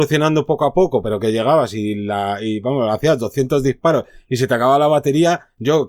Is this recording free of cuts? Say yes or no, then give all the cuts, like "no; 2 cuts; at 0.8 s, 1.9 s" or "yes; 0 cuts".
yes; 0 cuts